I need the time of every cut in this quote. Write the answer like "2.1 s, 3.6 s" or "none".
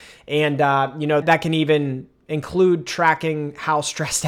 1.2 s

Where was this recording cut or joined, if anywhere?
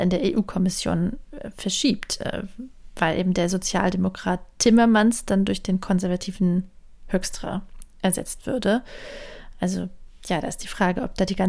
none

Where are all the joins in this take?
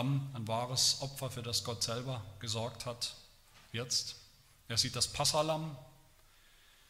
none

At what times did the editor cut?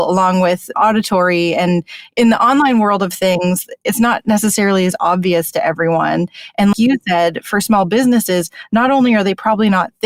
6.7 s

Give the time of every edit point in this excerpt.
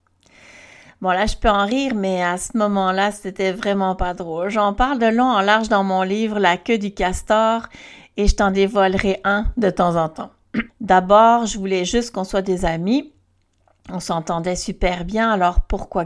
10.7 s

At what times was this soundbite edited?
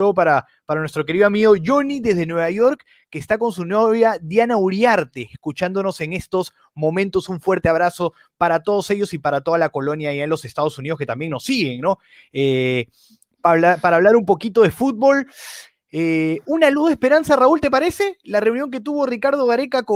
none

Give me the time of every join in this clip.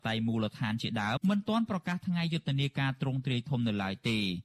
1.2 s

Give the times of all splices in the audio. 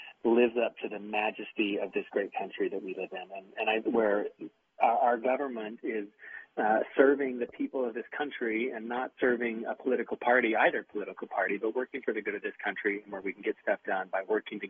3.9 s

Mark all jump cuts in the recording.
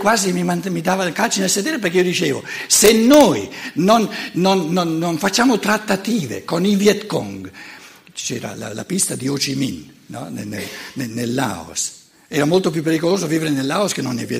none

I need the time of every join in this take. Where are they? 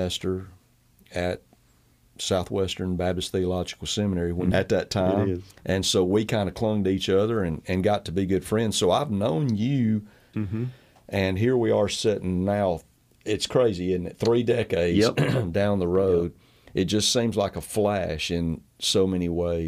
4.5 s, 10.3 s

